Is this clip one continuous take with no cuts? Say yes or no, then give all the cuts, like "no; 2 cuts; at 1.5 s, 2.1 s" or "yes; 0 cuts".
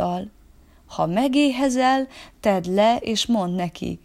yes; 0 cuts